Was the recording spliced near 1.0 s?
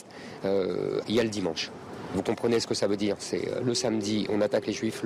yes; 1 cut; at 1.0 s

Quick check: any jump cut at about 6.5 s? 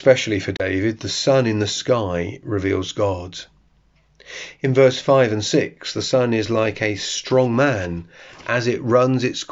no; 0 cuts

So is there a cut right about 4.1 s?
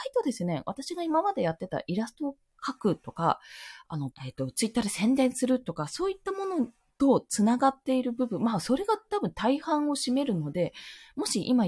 yes; 1 cut; at 4.1 s

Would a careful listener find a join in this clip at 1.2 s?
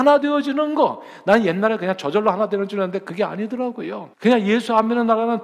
no; 1 cut; at 4.1 s

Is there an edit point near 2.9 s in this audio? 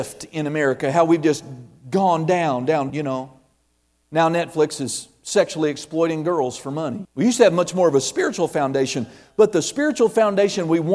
yes; 2 cuts; at 2.9 s, 7.0 s

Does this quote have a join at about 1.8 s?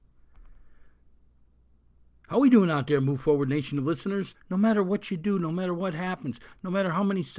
no; 1 cut; at 4.3 s

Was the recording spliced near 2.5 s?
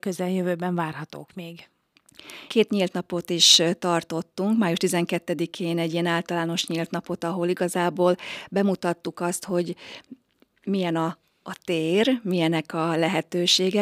yes; 1 cut; at 2.5 s

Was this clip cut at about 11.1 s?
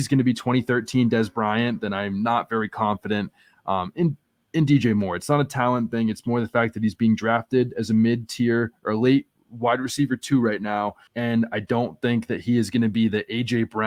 yes; 1 cut; at 11.1 s

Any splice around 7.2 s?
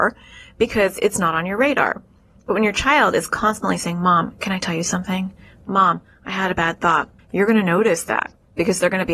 yes; 1 cut; at 7.2 s

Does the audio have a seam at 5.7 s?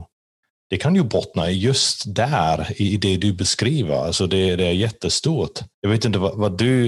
yes; 1 cut; at 5.7 s

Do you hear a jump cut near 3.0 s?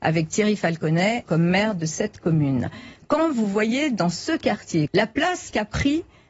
no; 2 cuts; at 1.3 s, 4.9 s

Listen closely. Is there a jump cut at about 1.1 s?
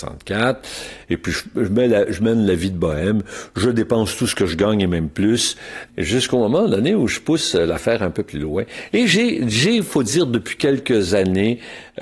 yes; 1 cut; at 1.1 s

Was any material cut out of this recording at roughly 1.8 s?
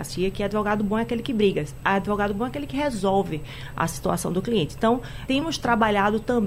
no; 1 cut; at 5.3 s

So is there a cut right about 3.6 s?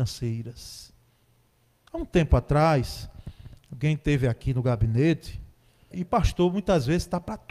no; 2 cuts; at 1.9 s, 5.9 s

